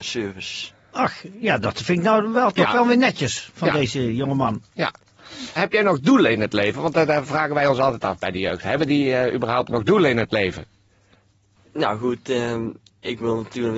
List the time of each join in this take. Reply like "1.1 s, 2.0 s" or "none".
5.6 s